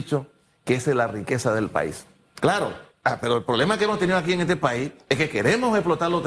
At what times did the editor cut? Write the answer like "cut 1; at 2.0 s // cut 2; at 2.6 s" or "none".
cut 1; at 2.4 s